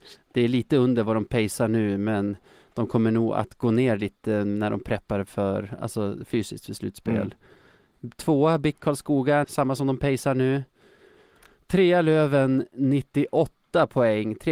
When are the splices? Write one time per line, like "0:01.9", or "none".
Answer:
0:09.4